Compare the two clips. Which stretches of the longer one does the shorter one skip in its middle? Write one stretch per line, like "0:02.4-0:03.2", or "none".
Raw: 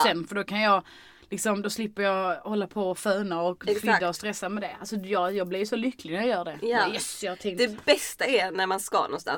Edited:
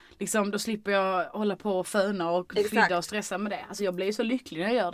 0:04.9-0:05.3